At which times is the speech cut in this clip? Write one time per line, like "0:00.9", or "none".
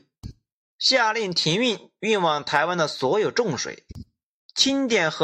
none